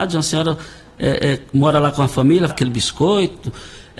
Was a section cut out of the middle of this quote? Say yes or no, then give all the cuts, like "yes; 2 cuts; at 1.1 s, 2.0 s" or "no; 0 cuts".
yes; 1 cut; at 2.5 s